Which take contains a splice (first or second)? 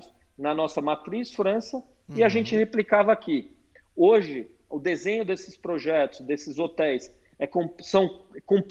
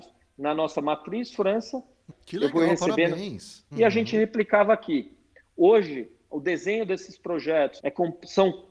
second